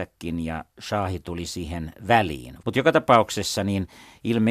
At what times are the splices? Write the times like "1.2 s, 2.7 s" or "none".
2.6 s

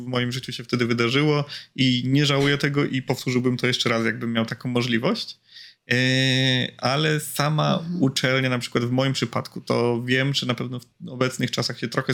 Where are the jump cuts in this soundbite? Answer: none

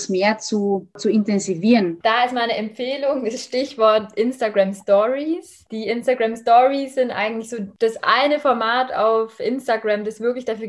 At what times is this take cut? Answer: 2.0 s

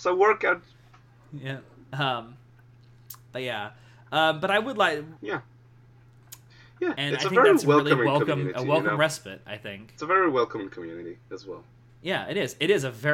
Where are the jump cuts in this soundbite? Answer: 5.2 s

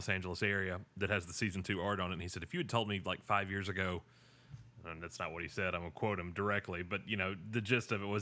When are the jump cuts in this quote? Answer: none

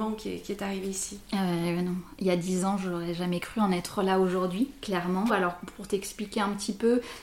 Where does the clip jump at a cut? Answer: 5.3 s

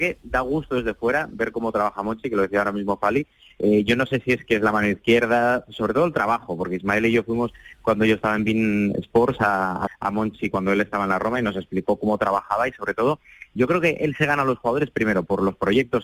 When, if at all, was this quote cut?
9.9 s

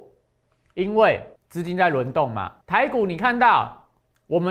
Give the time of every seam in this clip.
1.4 s, 2.6 s

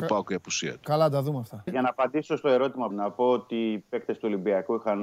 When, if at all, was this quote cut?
1.7 s, 2.9 s

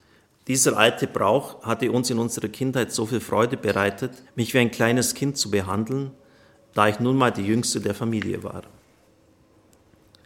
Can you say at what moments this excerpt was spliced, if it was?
4.2 s

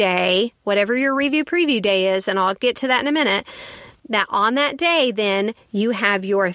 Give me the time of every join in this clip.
none

